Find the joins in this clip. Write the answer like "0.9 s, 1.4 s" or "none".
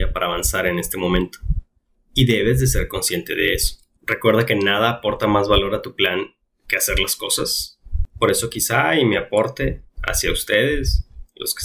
4.0 s, 8.1 s, 9.9 s